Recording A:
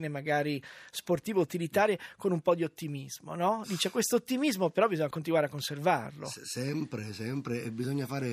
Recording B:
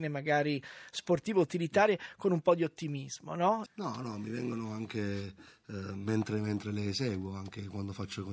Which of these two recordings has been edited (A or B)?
B